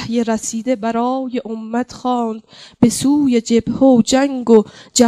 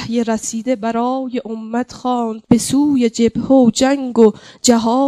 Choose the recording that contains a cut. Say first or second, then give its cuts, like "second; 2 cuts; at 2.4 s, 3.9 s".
second; 1 cut; at 2.4 s